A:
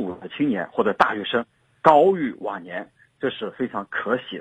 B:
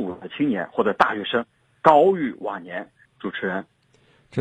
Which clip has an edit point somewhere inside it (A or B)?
B